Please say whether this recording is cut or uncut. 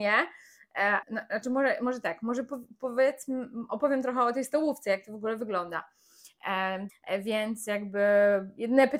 cut